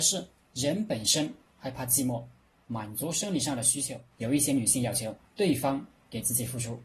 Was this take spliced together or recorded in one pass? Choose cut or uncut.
cut